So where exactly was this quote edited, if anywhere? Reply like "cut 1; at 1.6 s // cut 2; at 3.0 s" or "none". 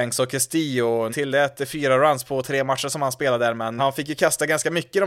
cut 1; at 1.1 s // cut 2; at 3.8 s